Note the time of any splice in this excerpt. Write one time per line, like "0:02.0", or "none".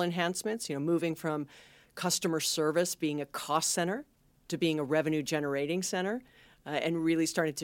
none

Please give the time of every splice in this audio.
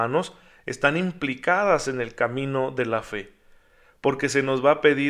none

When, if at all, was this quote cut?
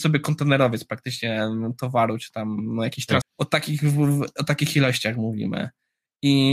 0:03.2

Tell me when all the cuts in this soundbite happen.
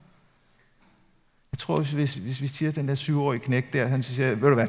0:02.1

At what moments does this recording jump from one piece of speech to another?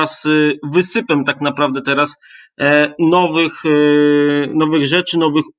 none

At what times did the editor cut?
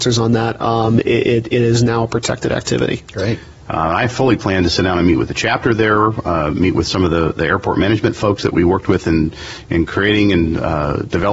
0:03.6

